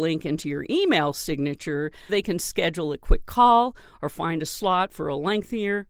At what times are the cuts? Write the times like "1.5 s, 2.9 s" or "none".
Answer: 2.1 s